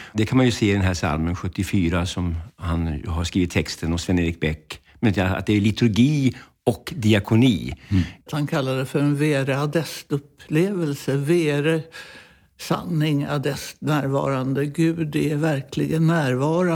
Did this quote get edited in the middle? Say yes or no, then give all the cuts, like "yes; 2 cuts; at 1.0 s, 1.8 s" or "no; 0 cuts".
yes; 1 cut; at 8.3 s